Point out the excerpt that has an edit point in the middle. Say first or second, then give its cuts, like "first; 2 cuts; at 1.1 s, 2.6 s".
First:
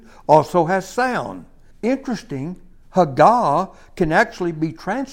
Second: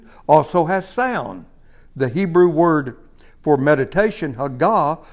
first; 1 cut; at 1.7 s